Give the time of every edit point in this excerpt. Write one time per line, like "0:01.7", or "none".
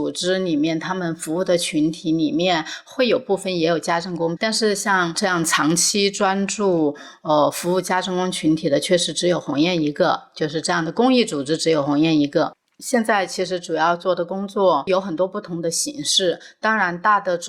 0:04.4